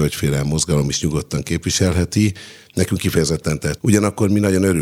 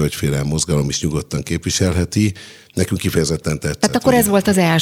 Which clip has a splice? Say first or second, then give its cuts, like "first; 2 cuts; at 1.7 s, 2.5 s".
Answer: first; 1 cut; at 3.8 s